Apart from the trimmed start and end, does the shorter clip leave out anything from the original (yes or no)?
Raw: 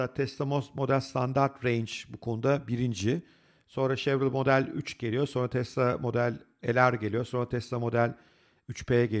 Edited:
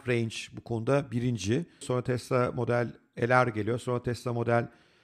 yes